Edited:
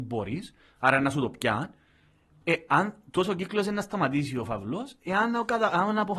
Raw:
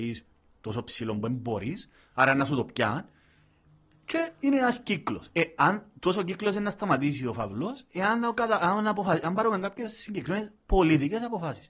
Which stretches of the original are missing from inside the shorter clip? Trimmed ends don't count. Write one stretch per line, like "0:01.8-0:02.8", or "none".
0:03.8-0:05.3